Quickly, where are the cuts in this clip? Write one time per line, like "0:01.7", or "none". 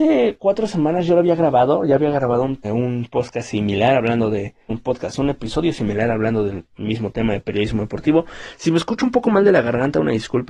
0:02.6
0:04.7